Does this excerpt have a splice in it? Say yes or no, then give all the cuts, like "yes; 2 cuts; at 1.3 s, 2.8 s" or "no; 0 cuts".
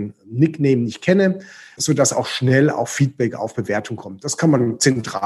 no; 0 cuts